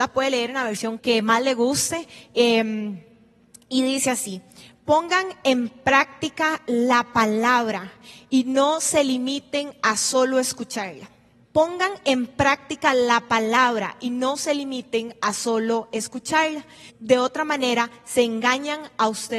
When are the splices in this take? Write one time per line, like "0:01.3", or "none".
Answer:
0:01.0
0:11.5
0:16.9